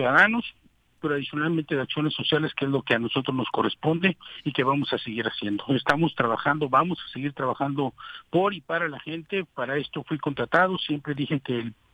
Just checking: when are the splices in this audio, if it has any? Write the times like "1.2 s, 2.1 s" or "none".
1.0 s